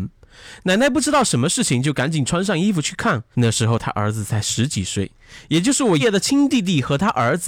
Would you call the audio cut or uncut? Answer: cut